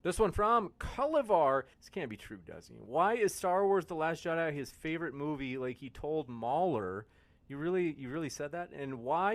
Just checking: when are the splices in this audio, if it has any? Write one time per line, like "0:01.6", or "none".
0:01.7

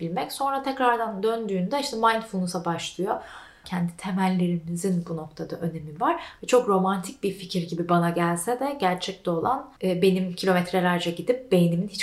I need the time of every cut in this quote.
0:03.6
0:06.4
0:09.8

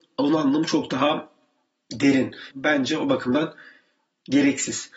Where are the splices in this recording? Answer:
0:02.5

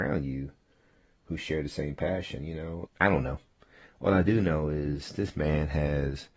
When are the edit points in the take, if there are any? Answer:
0:02.9

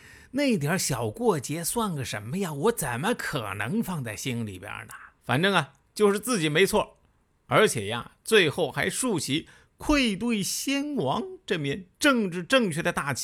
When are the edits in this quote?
0:05.2

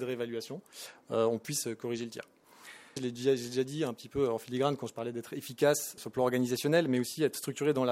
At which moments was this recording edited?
0:03.0
0:06.0

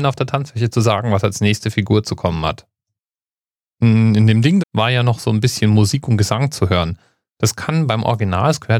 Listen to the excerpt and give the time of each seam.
0:04.6

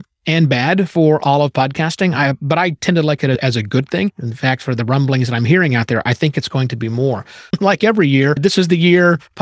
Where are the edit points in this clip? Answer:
0:04.1
0:07.5

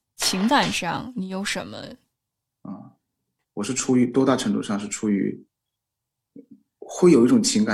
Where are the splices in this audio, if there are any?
0:02.5

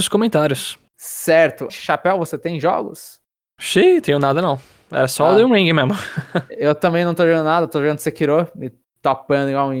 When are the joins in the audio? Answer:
0:01.7

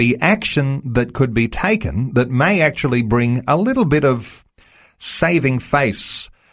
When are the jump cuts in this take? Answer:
none

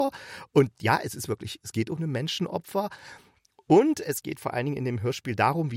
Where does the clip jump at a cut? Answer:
none

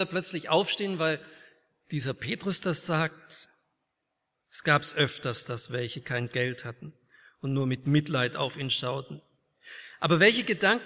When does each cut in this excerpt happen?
0:04.3

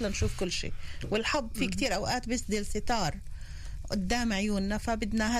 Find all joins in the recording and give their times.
none

